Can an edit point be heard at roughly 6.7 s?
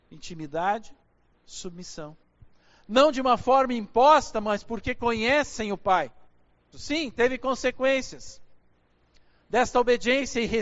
yes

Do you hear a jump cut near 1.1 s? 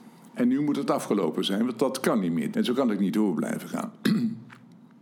no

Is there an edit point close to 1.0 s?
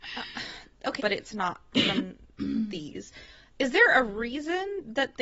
yes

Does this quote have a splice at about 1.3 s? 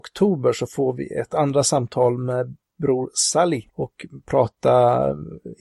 no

